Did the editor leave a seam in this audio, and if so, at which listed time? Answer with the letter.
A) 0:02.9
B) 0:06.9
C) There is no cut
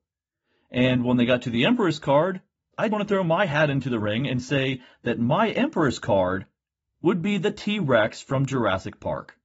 A